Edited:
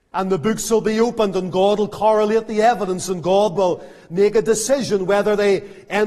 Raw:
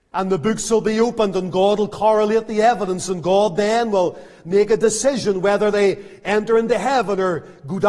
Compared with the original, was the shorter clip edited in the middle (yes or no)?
yes